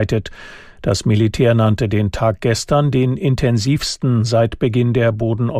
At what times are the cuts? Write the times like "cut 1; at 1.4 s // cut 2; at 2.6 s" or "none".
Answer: none

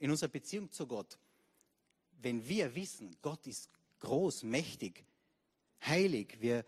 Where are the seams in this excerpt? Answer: none

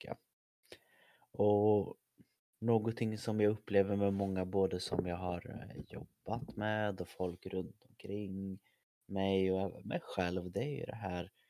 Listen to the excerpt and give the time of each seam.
none

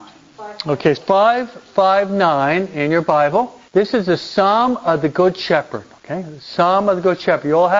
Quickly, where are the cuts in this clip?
cut 1; at 1.0 s // cut 2; at 3.7 s

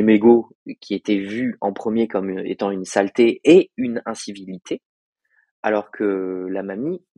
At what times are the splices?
none

